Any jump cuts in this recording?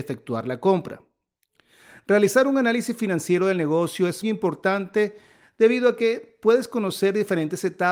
yes; 1 cut; at 4.2 s

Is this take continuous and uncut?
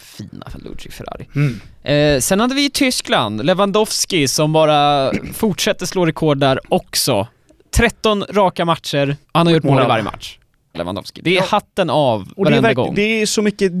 no; 2 cuts; at 9.2 s, 10.7 s

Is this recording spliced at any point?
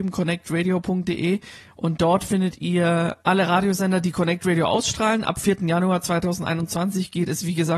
no; 0 cuts

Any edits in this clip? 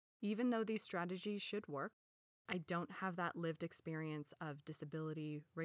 no; 0 cuts

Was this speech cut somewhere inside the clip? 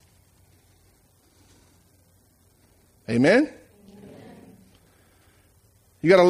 no; 0 cuts

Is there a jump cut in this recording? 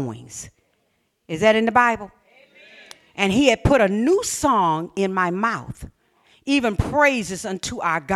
no; 0 cuts

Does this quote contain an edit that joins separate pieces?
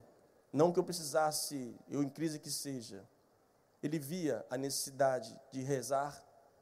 no; 0 cuts

